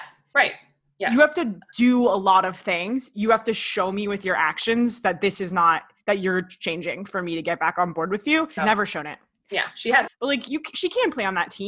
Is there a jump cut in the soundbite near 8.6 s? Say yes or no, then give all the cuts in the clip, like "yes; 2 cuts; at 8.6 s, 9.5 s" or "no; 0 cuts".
yes; 2 cuts; at 8.6 s, 10.1 s